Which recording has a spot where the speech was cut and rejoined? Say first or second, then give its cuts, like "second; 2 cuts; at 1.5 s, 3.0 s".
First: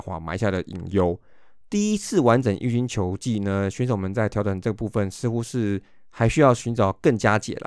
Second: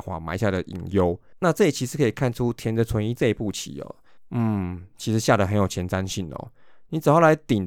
second; 1 cut; at 1.3 s